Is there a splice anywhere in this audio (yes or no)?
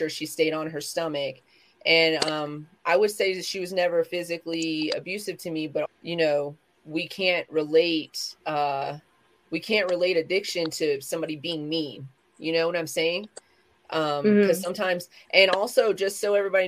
yes